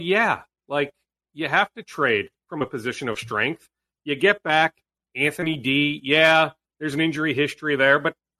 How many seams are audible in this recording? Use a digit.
0